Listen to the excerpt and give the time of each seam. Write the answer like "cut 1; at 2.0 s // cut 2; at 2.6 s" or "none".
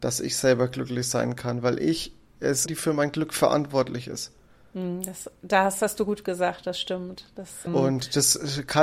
cut 1; at 2.7 s // cut 2; at 7.7 s